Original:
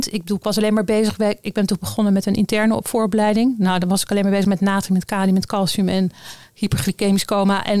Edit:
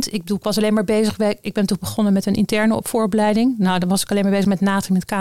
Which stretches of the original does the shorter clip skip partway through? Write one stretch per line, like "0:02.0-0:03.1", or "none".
none